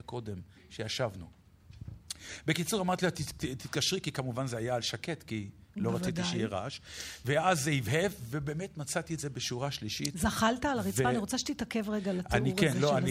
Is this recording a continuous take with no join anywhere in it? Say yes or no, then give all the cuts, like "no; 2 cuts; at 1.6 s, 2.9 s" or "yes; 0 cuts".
yes; 0 cuts